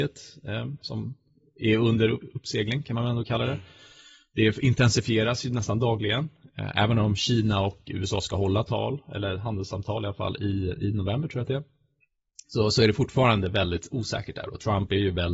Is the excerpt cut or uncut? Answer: uncut